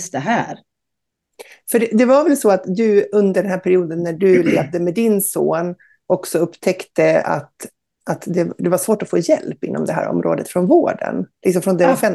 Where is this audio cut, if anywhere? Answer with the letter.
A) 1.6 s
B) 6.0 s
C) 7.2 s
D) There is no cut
D